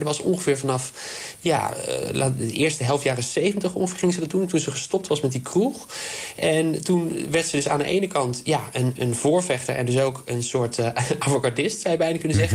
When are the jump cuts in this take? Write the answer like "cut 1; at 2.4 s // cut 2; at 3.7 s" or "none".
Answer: cut 1; at 9.0 s